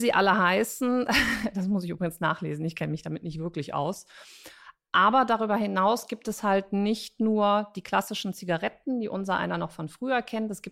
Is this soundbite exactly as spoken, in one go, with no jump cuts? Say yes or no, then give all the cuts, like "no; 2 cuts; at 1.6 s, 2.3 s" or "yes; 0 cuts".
yes; 0 cuts